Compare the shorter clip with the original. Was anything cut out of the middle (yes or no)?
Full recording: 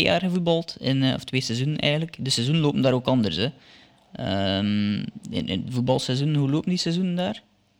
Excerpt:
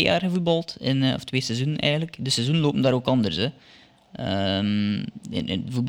no